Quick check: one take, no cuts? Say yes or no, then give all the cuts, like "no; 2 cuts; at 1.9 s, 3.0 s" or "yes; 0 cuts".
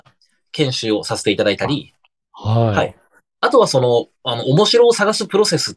yes; 0 cuts